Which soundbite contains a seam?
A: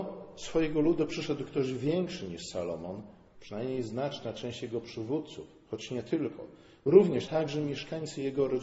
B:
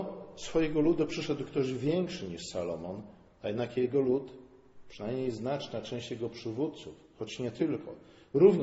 A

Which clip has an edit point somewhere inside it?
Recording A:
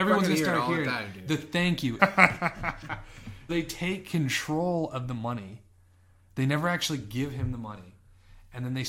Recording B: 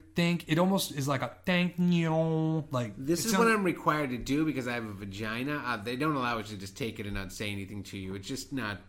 A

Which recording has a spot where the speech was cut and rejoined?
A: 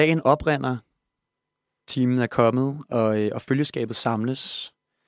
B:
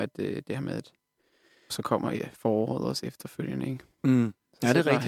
B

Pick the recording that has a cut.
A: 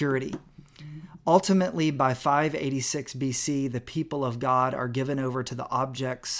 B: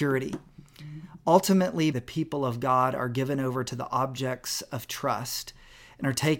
B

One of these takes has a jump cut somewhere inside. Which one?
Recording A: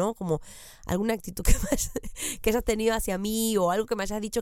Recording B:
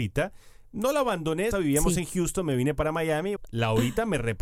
B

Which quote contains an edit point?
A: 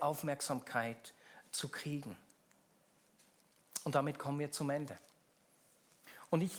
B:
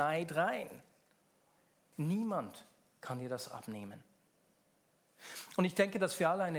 B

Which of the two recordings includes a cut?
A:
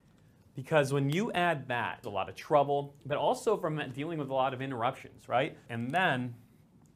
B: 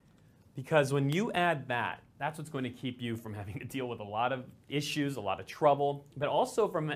A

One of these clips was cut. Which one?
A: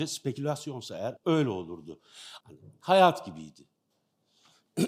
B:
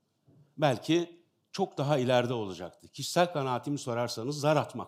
A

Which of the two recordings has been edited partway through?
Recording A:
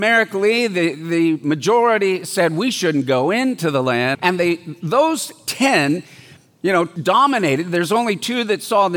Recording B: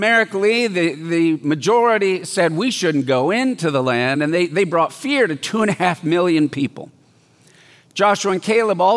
A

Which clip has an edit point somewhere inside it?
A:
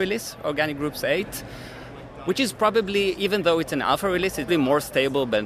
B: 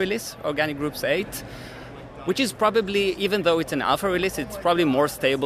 A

